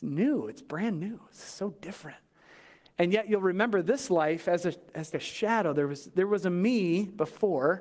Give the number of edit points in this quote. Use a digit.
1